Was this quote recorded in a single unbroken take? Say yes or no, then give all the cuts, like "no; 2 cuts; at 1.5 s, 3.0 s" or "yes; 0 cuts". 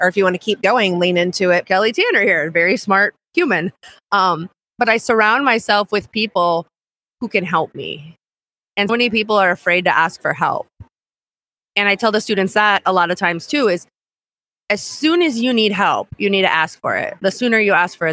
no; 2 cuts; at 1.6 s, 8.9 s